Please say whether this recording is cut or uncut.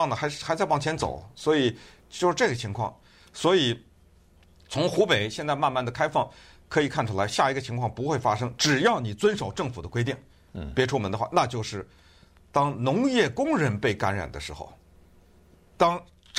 cut